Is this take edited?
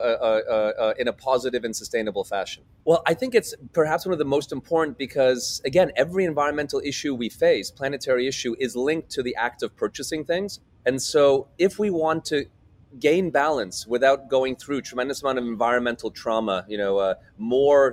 yes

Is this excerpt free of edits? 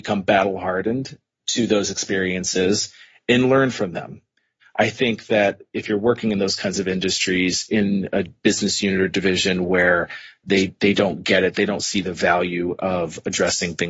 no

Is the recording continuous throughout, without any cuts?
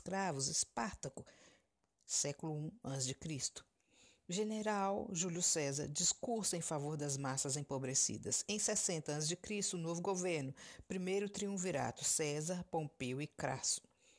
yes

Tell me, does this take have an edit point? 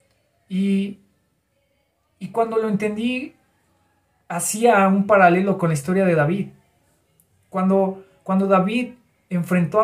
no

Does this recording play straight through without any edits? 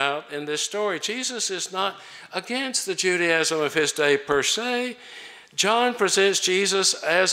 yes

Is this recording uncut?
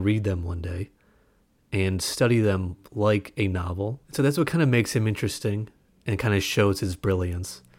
no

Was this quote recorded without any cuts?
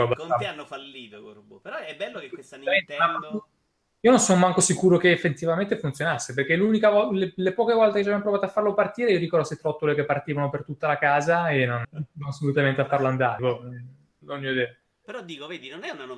no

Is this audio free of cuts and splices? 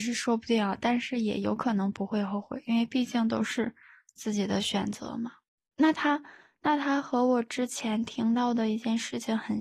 no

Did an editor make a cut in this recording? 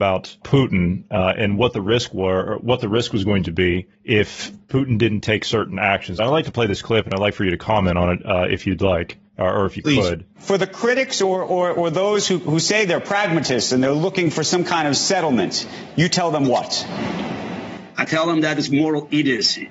no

